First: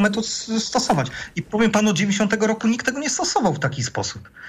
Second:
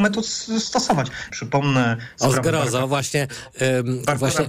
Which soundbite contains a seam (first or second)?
second